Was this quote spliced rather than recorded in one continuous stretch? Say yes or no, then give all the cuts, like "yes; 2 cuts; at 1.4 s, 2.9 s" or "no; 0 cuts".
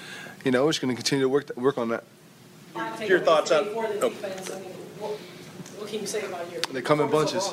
no; 0 cuts